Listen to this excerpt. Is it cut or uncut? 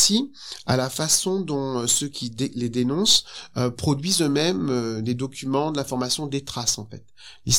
uncut